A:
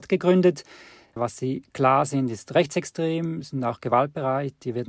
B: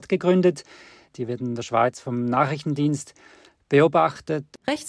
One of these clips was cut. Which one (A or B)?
B